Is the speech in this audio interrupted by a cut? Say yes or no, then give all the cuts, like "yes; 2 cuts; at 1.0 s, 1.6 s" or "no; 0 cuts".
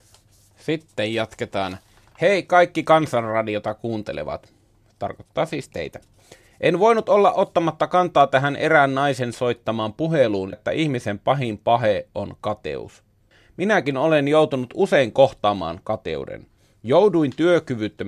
yes; 1 cut; at 10.5 s